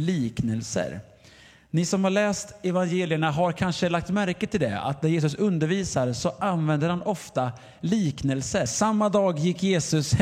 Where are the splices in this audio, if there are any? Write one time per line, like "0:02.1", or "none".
0:08.7